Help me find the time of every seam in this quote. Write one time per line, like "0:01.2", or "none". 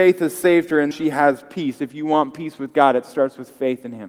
0:00.9